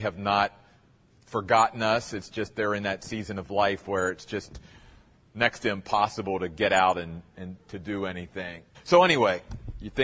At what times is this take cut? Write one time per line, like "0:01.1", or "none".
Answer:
0:08.7